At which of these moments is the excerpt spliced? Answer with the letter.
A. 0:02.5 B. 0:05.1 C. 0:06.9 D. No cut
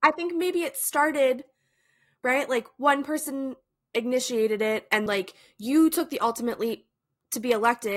B